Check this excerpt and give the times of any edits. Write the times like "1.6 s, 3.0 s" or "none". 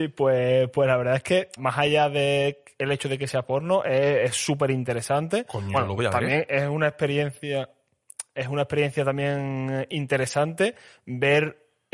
1.6 s, 5.7 s